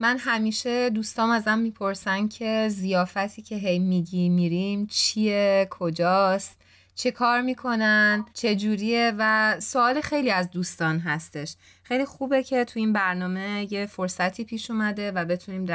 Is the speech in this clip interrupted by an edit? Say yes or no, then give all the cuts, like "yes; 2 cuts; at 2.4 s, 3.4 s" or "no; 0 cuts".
yes; 1 cut; at 8.3 s